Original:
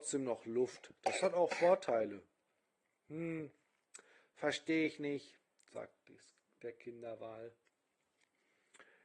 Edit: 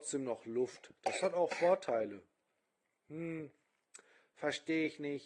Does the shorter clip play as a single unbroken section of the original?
yes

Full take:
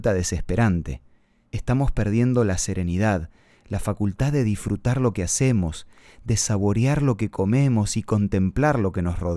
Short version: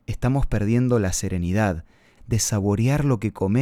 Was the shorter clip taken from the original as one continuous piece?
no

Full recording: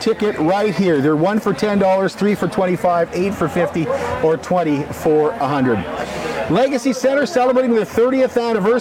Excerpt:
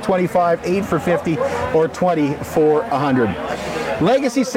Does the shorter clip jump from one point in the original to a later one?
no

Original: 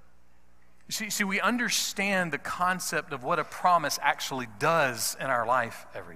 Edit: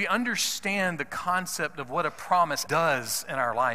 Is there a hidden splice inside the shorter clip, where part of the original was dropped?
yes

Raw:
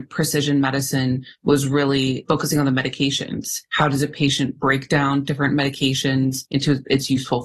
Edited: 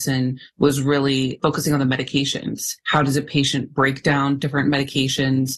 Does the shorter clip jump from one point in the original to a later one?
no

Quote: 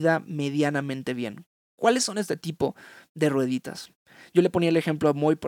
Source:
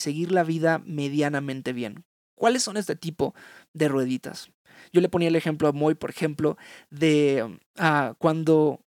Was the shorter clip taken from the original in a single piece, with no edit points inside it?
yes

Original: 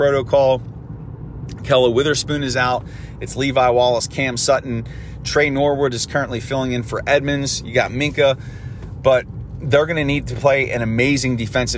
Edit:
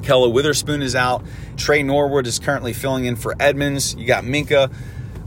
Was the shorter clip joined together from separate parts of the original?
yes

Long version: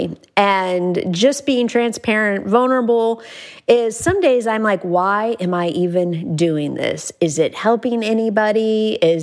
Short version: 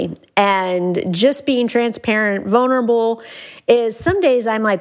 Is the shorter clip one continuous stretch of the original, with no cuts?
yes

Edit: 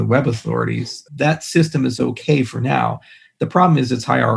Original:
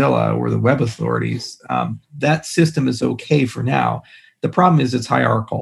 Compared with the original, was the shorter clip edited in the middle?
yes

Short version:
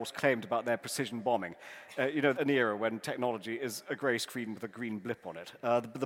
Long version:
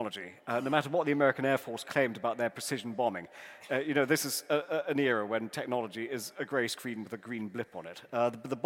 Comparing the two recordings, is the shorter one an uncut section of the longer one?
no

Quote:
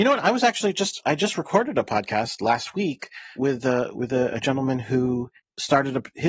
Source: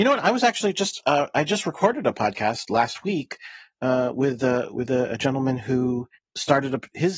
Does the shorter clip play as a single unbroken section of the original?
no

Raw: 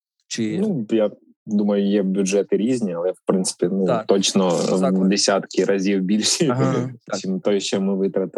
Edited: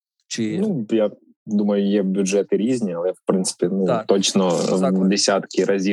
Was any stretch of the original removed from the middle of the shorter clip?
no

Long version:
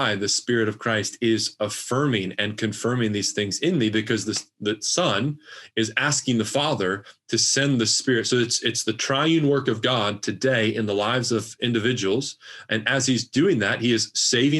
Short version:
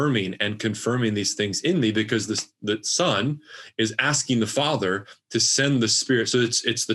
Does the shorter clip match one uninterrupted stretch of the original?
yes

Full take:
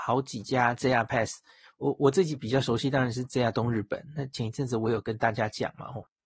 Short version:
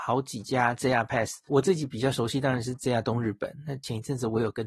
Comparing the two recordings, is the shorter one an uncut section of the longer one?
no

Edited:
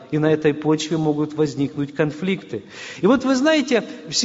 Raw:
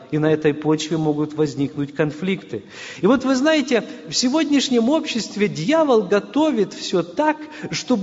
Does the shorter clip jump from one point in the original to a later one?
no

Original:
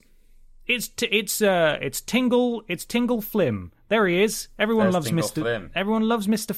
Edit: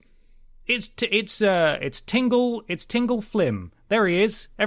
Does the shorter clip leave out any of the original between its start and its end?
no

